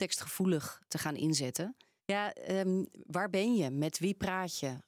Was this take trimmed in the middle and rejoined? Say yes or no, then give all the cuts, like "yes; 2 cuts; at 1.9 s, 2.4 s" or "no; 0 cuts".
yes; 1 cut; at 2.0 s